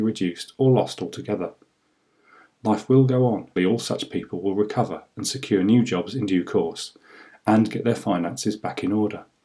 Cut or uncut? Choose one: cut